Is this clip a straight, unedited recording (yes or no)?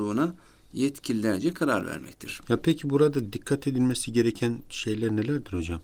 no